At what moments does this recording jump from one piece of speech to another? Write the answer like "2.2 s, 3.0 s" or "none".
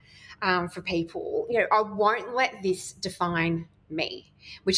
none

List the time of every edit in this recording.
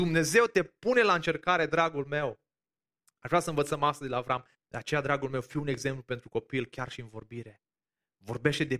4.5 s

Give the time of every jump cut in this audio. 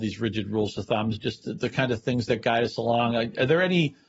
1.2 s

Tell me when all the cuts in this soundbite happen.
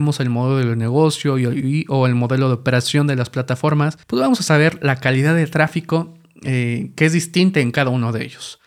4.0 s

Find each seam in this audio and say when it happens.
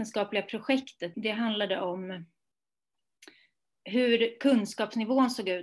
1.1 s

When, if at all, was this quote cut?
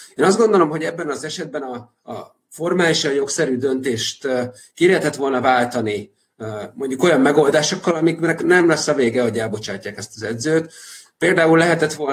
none

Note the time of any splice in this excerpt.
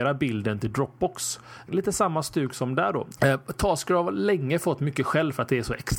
1.7 s, 3.2 s

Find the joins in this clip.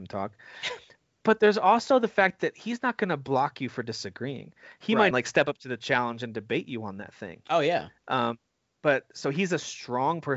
5.1 s

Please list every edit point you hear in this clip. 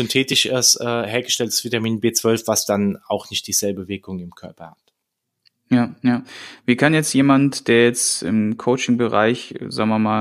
none

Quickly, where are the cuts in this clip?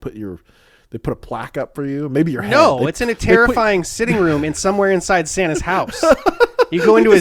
none

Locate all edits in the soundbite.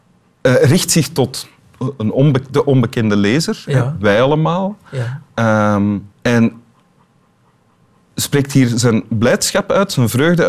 6.1 s

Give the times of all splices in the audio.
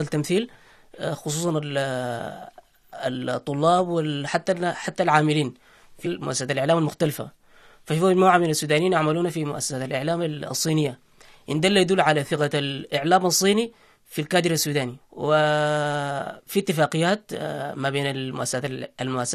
6.0 s

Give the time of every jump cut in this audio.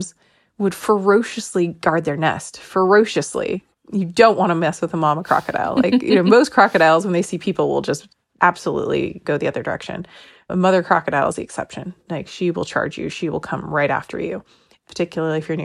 none

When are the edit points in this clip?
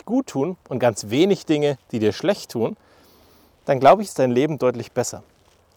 none

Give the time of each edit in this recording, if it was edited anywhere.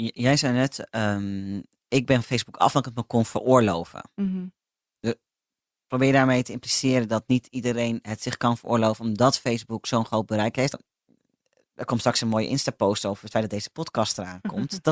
10.7 s

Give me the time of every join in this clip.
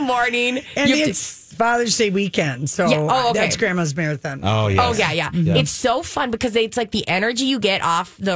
none

